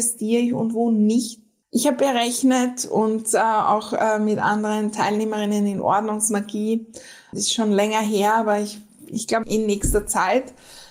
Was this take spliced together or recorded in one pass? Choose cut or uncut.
cut